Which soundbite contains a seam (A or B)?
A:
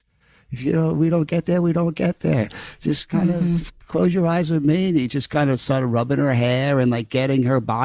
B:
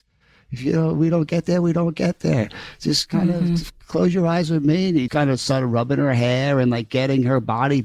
B